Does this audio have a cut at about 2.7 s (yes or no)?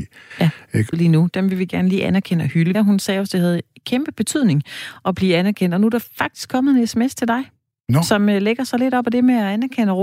yes